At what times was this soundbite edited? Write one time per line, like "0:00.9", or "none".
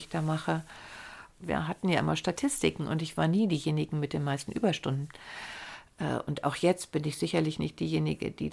0:01.4